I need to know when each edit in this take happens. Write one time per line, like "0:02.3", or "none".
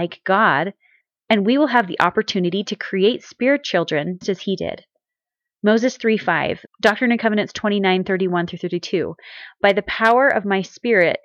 0:04.2
0:06.7